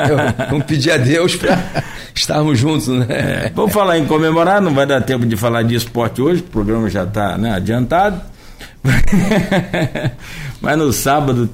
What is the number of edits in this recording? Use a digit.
0